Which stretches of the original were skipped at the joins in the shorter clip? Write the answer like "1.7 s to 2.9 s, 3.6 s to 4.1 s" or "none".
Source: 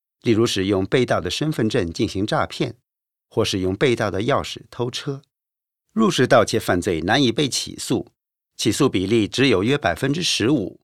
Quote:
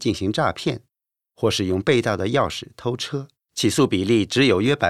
5.4 s to 8.4 s

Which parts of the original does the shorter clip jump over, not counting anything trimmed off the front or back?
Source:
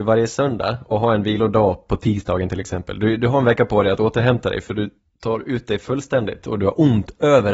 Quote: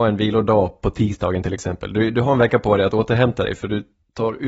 none

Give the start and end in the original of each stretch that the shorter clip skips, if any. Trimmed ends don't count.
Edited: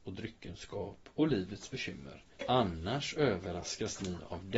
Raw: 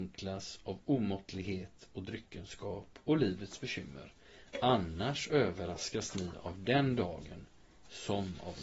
4.2 s to 4.5 s

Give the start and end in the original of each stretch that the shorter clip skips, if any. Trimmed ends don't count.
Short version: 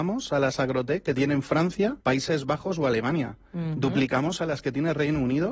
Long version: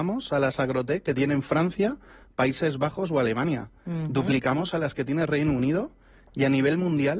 2.0 s to 2.3 s

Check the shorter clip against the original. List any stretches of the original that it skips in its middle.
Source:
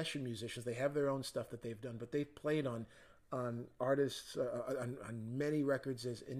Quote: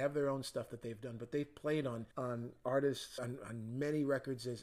2.9 s to 3.3 s, 4.3 s to 4.8 s

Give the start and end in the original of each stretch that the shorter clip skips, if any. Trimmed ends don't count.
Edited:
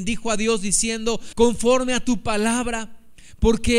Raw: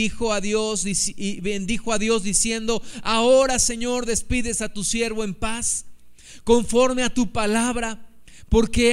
2.9 s to 6.4 s

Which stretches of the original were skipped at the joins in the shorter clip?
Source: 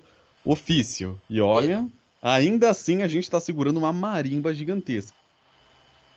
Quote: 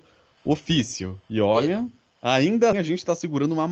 2.7 s to 3.0 s

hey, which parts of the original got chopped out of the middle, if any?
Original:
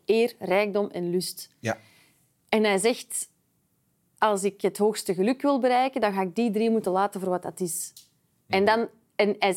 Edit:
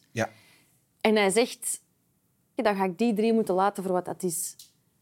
4.1 s to 5.9 s

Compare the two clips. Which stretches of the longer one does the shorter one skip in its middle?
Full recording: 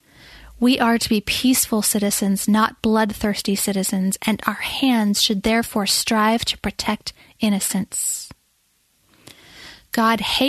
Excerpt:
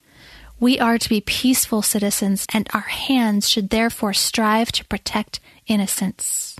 2.5 s to 4.2 s

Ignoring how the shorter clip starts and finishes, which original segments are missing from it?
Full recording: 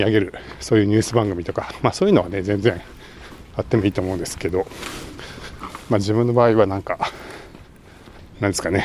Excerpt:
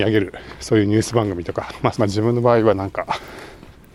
1.9 s to 5.8 s

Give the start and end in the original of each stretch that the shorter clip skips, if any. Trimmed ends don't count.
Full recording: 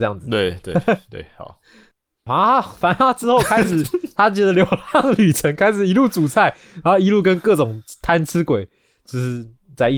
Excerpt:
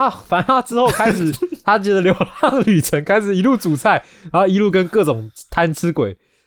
none

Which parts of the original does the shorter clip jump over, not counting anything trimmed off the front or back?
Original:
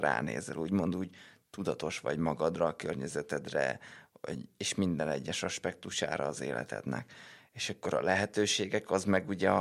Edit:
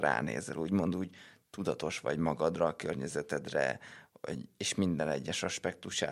none

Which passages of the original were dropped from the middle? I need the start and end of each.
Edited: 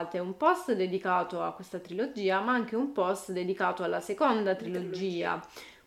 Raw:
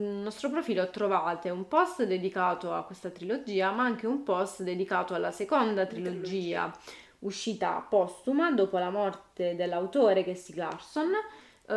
none

